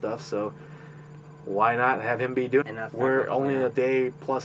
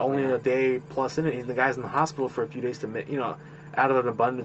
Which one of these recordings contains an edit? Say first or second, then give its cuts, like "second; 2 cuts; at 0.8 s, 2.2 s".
first; 1 cut; at 2.6 s